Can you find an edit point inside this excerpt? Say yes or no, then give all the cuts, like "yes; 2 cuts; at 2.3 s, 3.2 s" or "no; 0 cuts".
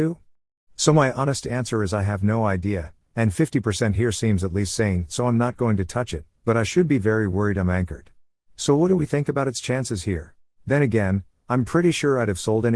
yes; 2 cuts; at 8.4 s, 10.5 s